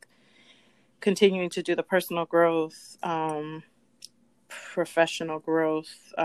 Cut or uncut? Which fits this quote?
uncut